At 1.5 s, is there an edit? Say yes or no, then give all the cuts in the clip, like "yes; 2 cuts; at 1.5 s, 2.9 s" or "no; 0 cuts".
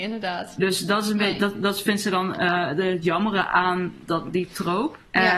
no; 0 cuts